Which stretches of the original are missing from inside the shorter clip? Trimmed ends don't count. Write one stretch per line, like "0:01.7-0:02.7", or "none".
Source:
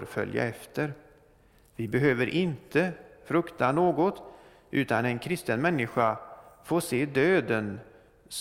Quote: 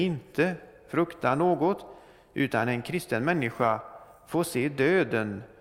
none